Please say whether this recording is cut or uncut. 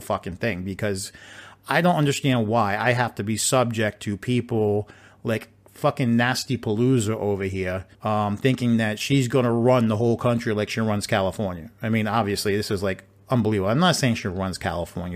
cut